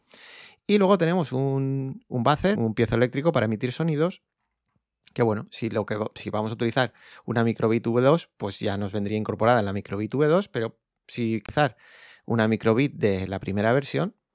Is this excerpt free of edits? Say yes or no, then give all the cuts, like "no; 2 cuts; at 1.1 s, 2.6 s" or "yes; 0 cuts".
no; 1 cut; at 2.5 s